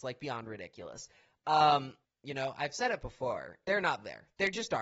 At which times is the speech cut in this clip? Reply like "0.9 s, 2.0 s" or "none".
2.0 s, 3.6 s